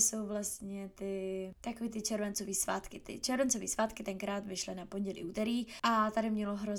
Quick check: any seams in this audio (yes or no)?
no